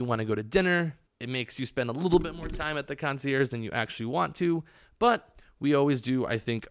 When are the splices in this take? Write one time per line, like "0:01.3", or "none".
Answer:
0:01.1